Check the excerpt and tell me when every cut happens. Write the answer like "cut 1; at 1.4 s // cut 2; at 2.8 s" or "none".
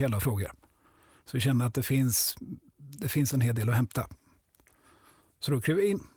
none